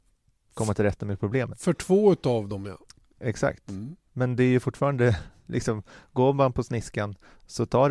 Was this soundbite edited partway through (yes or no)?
no